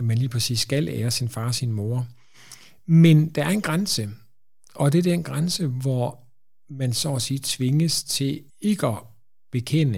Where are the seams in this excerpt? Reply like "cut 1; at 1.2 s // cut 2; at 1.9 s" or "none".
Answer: cut 1; at 8.5 s